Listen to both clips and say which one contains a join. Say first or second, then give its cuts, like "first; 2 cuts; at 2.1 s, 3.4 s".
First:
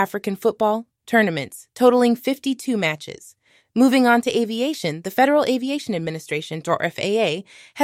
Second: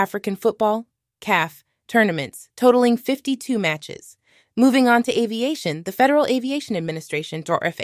first; 1 cut; at 1.0 s